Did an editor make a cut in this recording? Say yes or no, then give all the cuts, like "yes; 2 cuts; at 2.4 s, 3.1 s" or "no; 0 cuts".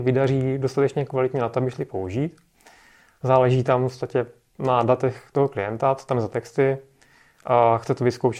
no; 0 cuts